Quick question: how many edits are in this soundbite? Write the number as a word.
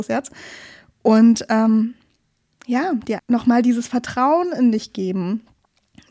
one